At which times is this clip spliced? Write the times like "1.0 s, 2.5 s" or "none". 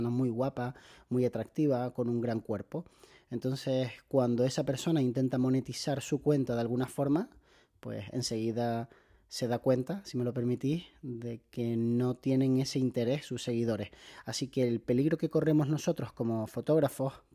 none